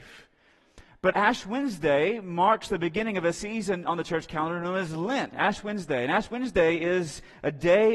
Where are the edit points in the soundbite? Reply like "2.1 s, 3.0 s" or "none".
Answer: 1.1 s, 5.3 s